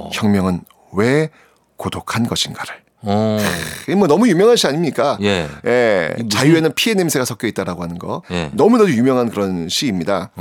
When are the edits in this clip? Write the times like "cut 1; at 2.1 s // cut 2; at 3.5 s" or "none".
none